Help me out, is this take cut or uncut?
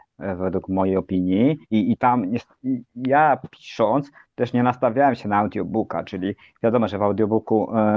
cut